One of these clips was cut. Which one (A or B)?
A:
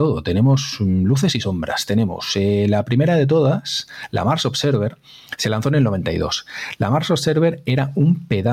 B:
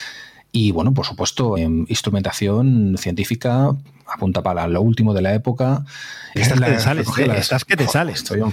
B